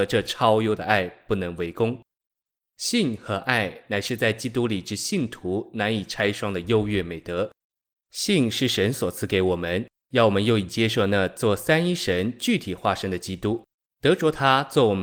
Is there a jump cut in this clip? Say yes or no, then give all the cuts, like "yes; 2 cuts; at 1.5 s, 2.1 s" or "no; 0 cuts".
yes; 2 cuts; at 2.7 s, 13.9 s